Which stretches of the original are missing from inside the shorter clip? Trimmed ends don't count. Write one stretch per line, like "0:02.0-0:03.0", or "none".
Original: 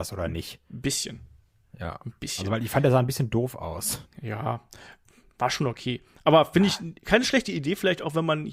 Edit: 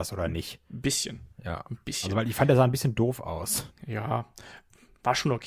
0:01.3-0:01.7